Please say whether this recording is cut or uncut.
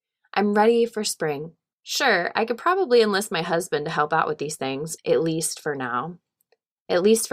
cut